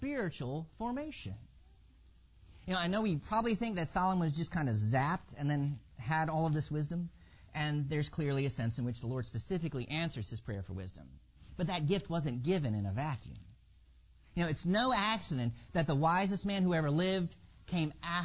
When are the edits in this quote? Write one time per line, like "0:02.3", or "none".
none

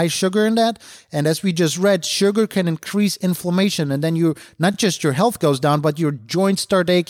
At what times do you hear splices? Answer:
none

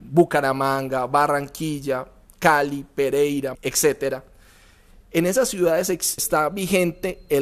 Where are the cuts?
0:03.5
0:06.2

